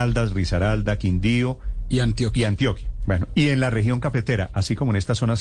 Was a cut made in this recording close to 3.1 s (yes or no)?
yes